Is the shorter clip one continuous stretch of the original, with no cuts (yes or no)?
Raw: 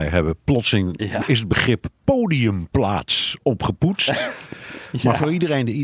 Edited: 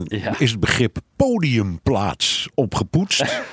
yes